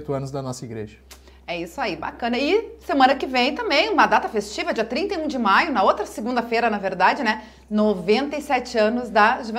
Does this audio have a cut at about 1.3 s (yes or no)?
no